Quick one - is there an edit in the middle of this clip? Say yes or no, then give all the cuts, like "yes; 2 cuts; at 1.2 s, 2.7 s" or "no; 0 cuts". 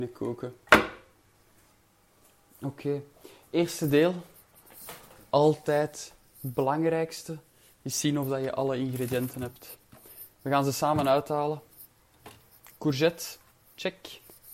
no; 0 cuts